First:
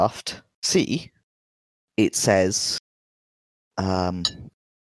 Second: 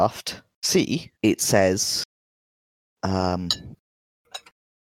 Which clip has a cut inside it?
second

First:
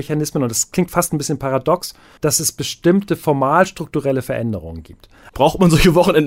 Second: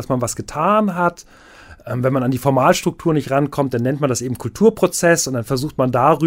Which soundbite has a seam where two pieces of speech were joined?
first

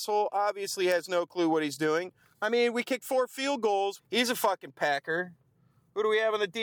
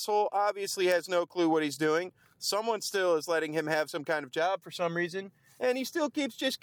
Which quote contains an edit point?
first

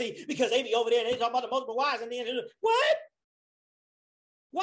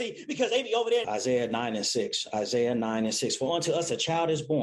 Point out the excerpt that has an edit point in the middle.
second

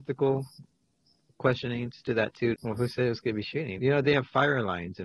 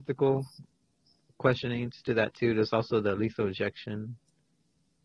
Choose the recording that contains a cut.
first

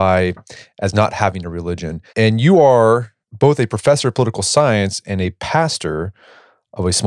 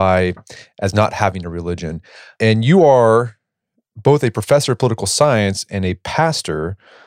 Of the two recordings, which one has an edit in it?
first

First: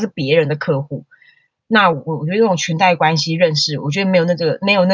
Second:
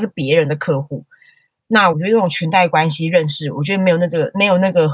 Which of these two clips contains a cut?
second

